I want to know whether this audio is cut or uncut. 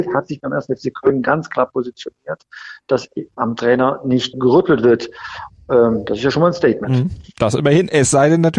cut